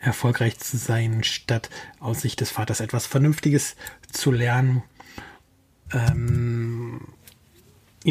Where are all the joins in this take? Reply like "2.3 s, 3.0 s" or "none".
5.9 s